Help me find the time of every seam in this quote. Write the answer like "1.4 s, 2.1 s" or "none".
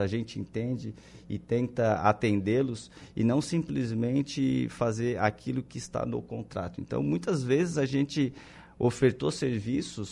none